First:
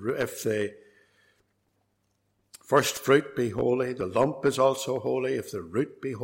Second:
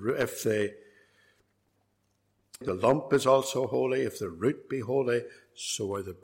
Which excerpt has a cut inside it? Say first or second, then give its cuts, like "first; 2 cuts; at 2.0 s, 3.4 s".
second; 1 cut; at 2.6 s